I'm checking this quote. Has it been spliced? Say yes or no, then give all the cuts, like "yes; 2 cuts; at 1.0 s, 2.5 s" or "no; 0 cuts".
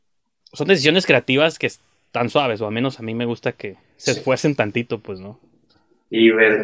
no; 0 cuts